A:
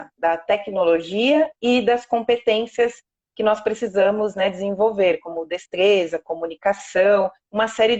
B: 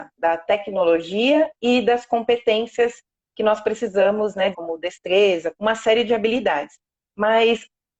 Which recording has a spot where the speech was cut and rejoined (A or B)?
B